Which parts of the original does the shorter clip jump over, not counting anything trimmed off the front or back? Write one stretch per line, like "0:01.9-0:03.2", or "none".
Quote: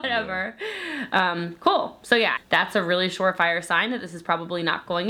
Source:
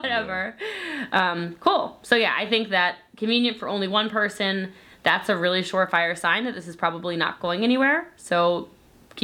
0:02.4-0:04.9